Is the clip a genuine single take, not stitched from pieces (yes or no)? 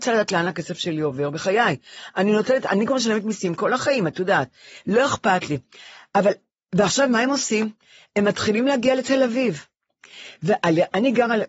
yes